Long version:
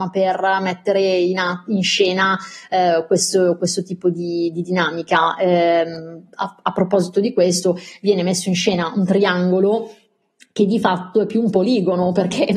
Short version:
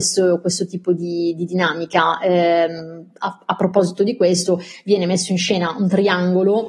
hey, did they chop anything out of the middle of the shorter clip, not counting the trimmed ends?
no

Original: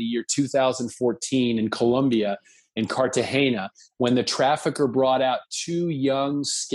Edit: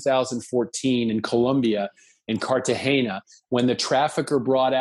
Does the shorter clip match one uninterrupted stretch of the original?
yes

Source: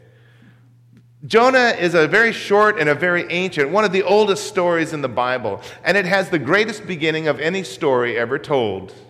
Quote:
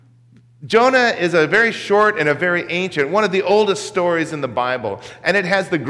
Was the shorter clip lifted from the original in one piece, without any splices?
yes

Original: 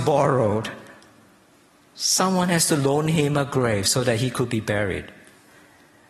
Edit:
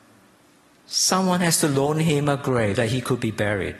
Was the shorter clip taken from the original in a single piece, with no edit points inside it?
no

